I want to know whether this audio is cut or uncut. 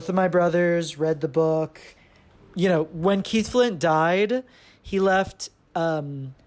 cut